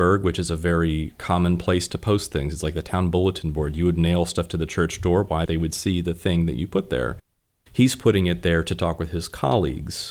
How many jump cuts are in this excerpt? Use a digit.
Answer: 1